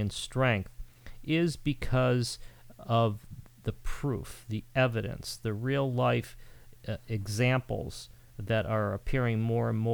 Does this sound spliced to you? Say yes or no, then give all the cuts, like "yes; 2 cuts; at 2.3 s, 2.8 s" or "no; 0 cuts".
no; 0 cuts